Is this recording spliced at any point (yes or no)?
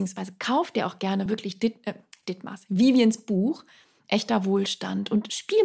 no